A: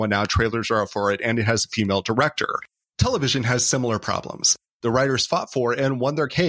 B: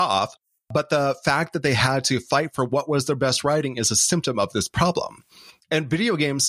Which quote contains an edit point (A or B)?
A